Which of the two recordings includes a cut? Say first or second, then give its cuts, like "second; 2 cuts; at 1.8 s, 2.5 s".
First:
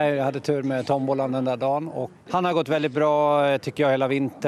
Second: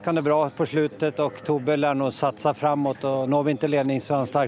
first; 1 cut; at 2.3 s